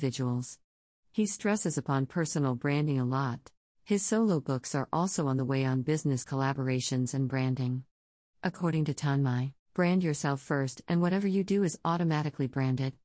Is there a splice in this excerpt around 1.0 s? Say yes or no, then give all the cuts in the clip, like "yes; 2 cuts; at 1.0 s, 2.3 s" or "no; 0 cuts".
no; 3 cuts; at 3.6 s, 8.2 s, 9.6 s